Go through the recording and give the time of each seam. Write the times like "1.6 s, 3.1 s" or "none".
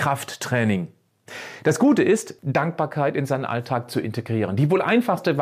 2.4 s